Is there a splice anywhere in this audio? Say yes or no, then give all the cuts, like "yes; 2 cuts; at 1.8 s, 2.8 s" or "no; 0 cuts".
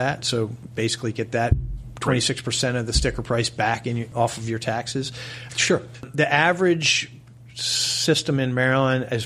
yes; 1 cut; at 5.5 s